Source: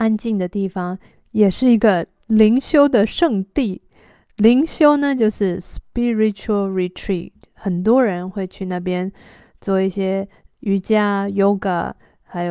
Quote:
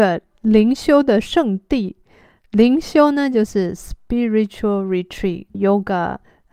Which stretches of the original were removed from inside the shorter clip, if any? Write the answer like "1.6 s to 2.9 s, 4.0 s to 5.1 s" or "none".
7.4 s to 11.3 s